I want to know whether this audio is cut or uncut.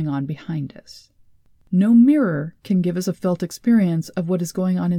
cut